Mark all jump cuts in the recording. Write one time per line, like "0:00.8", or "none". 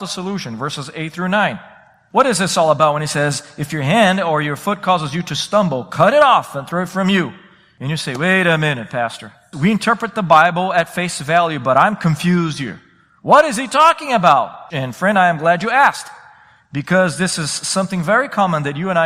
0:09.5

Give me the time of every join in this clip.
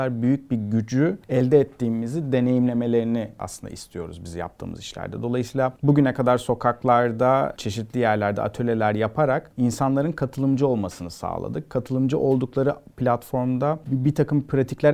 none

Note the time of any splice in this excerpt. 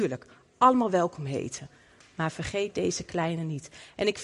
none

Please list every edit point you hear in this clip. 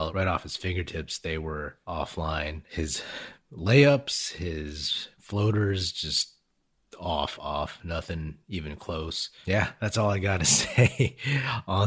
0:07.4

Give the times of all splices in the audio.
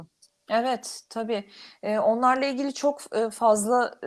none

